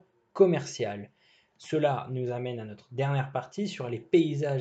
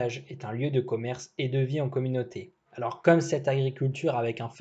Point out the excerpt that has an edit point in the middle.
second; 1 cut; at 2.7 s

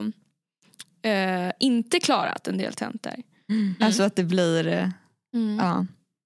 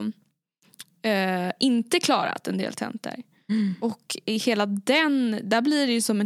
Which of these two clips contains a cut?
first; 1 cut; at 3.8 s

